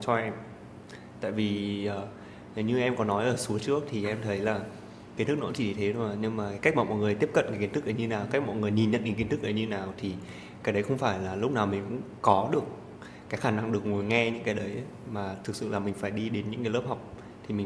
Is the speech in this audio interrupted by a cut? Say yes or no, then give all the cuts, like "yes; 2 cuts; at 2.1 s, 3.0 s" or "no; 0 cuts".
no; 0 cuts